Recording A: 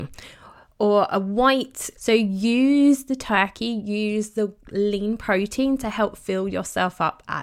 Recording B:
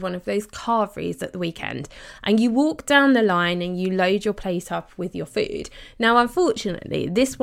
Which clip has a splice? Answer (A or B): A